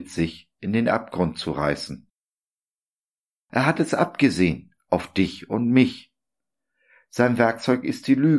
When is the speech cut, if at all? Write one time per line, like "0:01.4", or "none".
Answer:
none